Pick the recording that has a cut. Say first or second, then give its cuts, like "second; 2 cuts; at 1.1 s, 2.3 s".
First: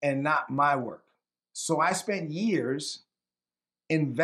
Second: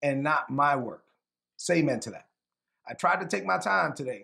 first; 1 cut; at 1.4 s